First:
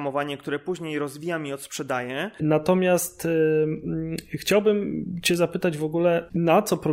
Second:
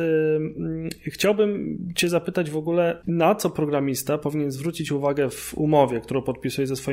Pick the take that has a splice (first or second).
first